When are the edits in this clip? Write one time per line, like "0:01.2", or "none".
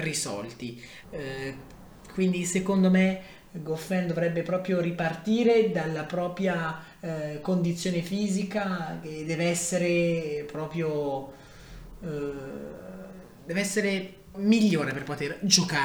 0:01.0
0:14.3